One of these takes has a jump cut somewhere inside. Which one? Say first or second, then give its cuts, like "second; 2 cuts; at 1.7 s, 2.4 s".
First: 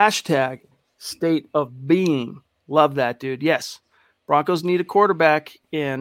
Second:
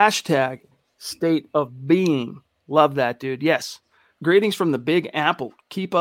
second; 1 cut; at 4.2 s